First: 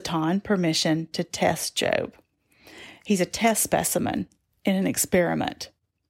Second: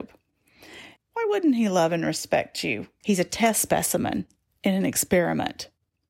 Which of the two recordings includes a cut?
second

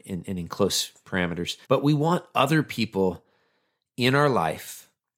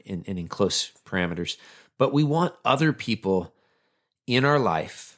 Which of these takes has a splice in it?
first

